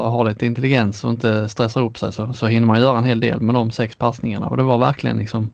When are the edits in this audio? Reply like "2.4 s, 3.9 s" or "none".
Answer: none